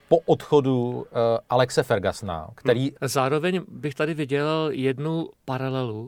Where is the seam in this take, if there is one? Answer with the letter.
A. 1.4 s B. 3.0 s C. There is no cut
B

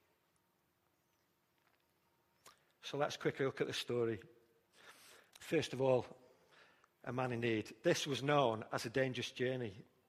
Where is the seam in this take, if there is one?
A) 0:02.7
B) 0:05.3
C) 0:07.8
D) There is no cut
B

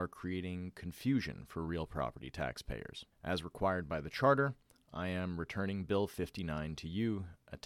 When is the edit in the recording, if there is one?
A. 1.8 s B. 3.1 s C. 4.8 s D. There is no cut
B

